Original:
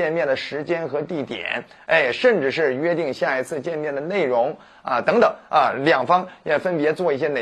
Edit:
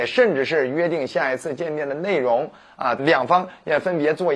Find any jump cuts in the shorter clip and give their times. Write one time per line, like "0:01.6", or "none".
0:03.0